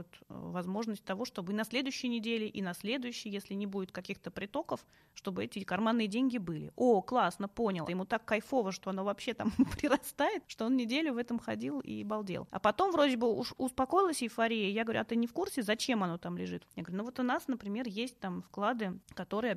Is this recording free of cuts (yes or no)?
no